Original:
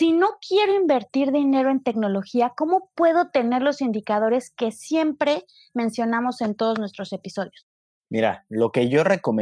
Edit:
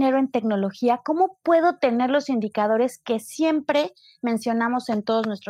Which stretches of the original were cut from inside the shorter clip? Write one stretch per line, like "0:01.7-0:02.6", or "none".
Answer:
none